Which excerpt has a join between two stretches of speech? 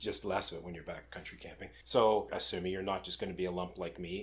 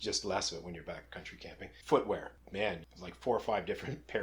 first; 1 cut; at 1.8 s

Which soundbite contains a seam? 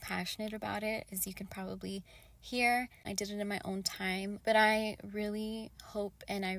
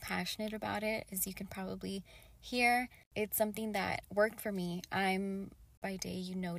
first; 2 cuts; at 3.0 s, 4.4 s

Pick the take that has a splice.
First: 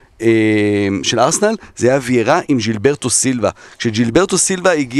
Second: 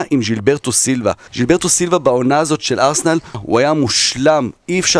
second; 2 cuts; at 1.3 s, 3.3 s

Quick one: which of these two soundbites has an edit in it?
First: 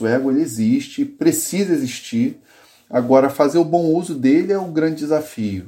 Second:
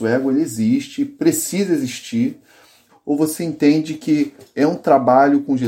second; 1 cut; at 2.9 s

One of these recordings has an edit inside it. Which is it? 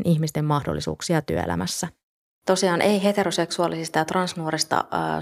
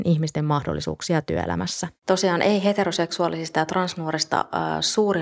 second; 1 cut; at 2.0 s

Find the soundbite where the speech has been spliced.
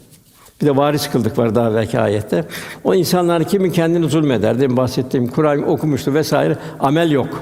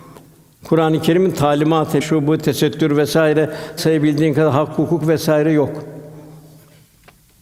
second; 2 cuts; at 2.0 s, 3.8 s

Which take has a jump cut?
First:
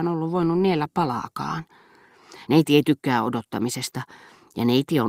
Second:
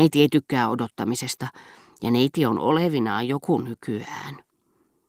first; 1 cut; at 2.5 s

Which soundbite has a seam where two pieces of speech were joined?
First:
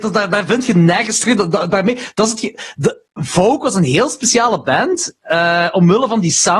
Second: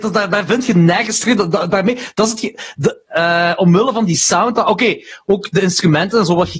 second; 1 cut; at 3.0 s

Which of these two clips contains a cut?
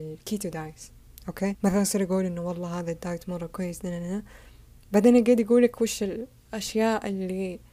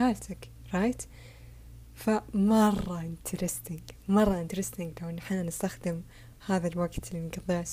first; 1 cut; at 1.5 s

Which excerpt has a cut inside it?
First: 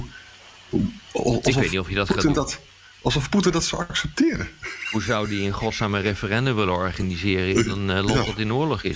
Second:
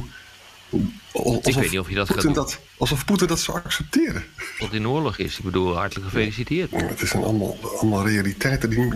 second; 3 cuts; at 2.7 s, 4.6 s, 6.7 s

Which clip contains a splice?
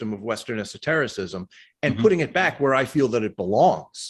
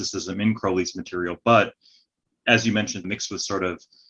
second; 1 cut; at 3.0 s

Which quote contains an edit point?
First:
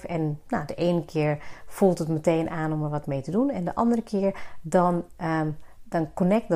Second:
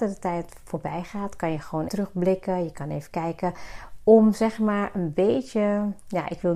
second; 1 cut; at 1.9 s

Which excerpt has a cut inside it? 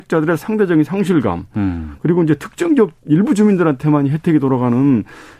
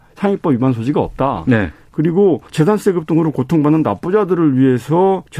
second; 1 cut; at 2.5 s

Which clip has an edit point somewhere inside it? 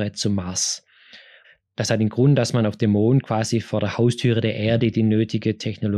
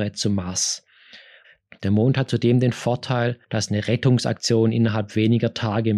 second; 2 cuts; at 1.7 s, 3.4 s

